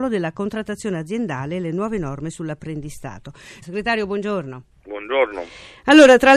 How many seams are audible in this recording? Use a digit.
1